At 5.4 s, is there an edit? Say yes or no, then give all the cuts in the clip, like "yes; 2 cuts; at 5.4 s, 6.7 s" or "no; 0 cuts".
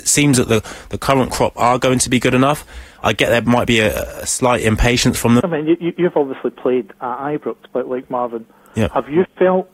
yes; 2 cuts; at 5.4 s, 7.7 s